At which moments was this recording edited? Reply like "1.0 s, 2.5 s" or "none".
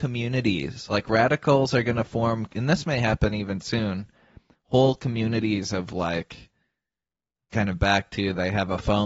none